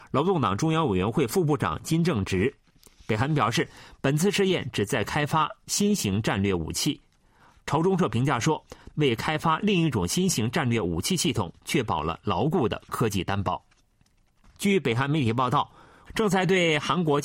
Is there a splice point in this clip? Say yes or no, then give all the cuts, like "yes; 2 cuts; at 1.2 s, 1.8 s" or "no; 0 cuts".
yes; 3 cuts; at 8.9 s, 14.5 s, 16.1 s